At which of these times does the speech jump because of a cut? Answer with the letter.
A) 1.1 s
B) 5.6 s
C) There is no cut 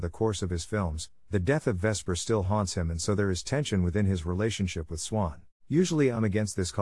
B